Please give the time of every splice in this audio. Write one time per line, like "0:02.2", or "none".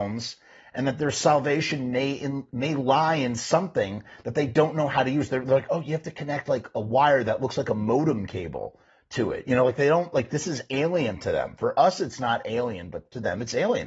none